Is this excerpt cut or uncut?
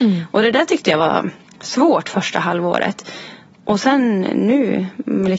uncut